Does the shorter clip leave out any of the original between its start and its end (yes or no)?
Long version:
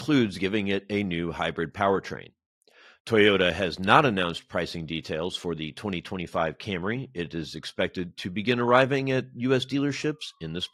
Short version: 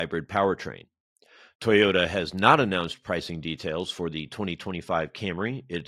no